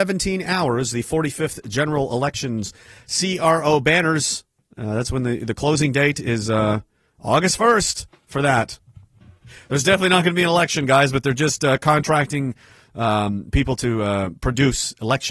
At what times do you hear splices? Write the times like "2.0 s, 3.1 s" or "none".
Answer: none